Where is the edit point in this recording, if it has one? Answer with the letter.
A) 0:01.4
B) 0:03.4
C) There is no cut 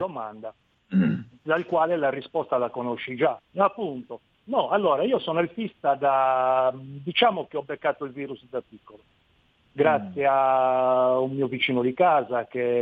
B